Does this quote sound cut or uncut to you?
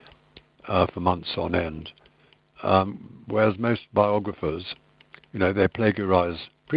uncut